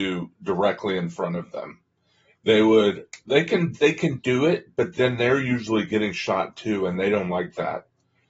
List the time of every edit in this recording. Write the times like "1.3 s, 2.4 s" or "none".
none